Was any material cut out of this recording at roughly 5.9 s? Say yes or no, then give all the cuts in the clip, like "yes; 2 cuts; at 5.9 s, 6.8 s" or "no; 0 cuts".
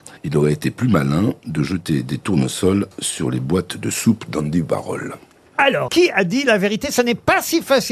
yes; 1 cut; at 5.9 s